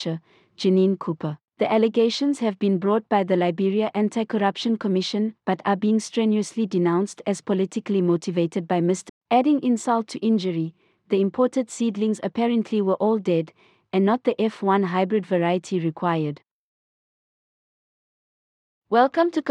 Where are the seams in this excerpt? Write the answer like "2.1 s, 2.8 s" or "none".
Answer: 1.5 s, 5.4 s, 9.1 s